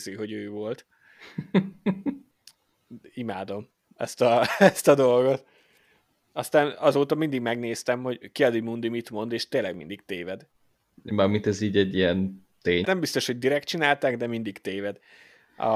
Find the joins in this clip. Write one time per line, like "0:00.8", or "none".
0:12.8